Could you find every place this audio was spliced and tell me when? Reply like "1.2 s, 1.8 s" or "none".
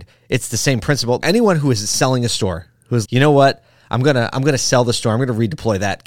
1.2 s, 3.0 s